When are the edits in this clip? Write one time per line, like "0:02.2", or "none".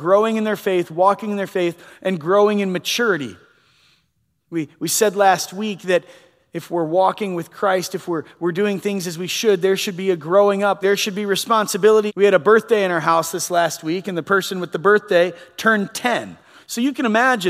0:10.8
0:12.1